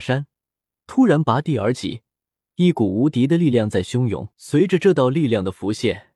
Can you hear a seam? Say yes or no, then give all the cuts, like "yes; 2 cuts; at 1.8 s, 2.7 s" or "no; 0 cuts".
yes; 1 cut; at 4.3 s